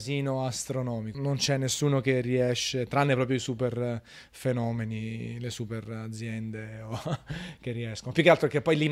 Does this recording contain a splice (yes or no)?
yes